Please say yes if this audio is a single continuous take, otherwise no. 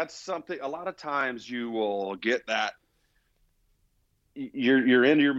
yes